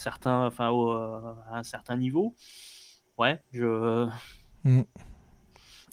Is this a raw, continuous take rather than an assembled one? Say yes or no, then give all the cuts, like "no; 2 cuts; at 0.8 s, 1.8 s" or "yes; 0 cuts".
yes; 0 cuts